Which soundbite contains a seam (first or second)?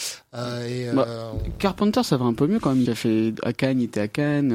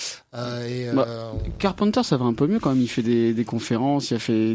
first